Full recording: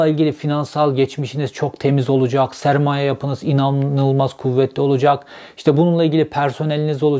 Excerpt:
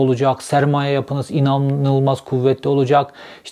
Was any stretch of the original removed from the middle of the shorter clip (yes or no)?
no